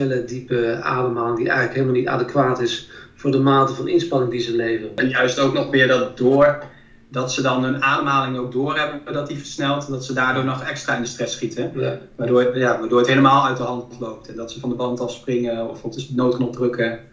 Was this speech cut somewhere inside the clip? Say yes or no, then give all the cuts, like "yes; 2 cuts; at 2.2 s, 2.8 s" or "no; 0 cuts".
no; 0 cuts